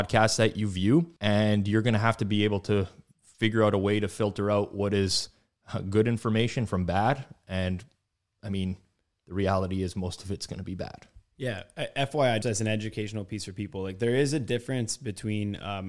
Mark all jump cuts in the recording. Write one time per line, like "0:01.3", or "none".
0:01.2
0:12.4